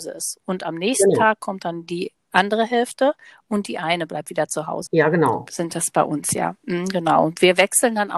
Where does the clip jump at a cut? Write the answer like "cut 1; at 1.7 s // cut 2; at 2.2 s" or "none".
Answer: cut 1; at 4.9 s